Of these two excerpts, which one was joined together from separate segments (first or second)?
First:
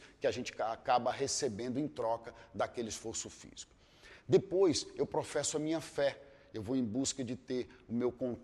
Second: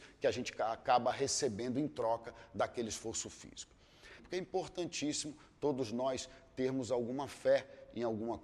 second